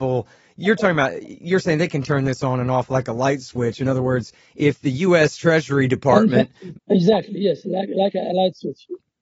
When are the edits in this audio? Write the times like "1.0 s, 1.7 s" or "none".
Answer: 6.7 s